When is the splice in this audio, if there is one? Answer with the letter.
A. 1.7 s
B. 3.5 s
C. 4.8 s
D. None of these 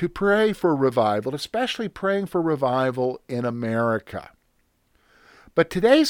D